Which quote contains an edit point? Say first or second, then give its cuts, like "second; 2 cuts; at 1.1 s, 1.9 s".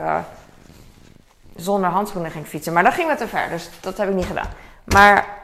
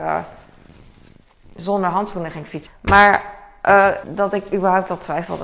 second; 2 cuts; at 2.7 s, 4.0 s